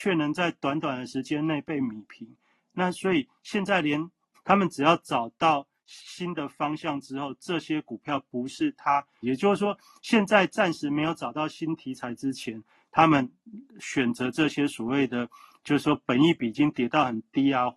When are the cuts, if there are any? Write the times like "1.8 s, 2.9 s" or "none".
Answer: 4.3 s, 9.2 s